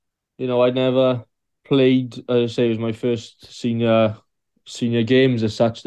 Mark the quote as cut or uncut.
uncut